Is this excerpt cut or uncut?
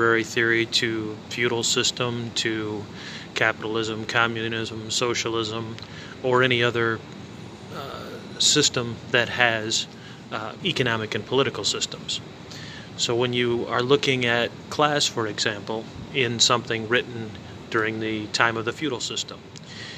cut